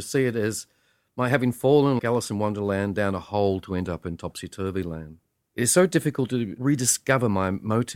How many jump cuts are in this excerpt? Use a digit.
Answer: 2